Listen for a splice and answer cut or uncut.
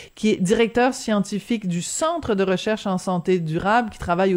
uncut